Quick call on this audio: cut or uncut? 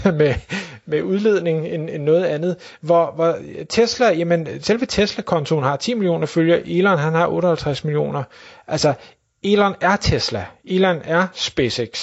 uncut